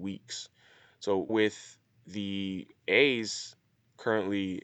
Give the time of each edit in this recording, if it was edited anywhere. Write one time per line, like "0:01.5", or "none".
0:01.3
0:02.8